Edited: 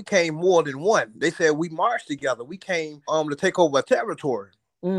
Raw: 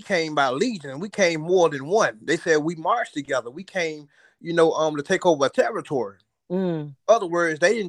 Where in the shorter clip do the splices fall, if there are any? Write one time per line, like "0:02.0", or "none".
0:03.1